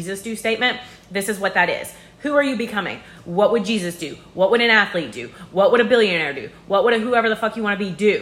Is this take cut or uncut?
uncut